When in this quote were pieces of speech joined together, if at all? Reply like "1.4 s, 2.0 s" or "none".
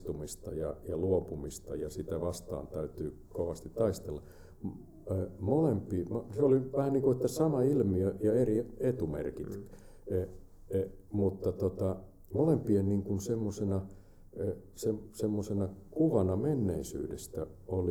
none